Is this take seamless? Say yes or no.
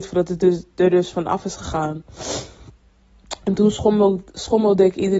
yes